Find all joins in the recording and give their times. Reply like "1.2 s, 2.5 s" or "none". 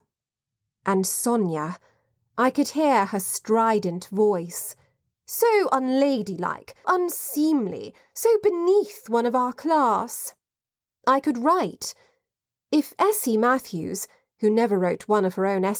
6.8 s, 10.9 s